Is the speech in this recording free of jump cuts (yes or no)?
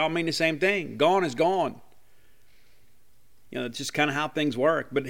yes